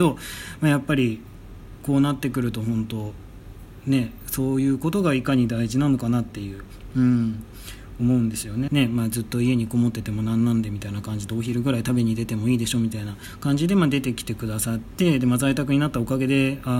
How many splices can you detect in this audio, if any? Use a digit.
1